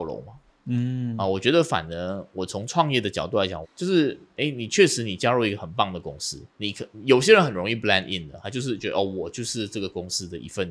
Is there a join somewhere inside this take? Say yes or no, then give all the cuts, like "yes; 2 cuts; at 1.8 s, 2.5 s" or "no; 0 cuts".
yes; 2 cuts; at 3.6 s, 6.5 s